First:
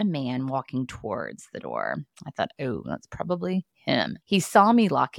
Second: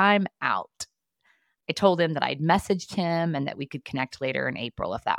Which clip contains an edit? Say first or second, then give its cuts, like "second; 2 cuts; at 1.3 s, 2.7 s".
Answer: first; 1 cut; at 4.2 s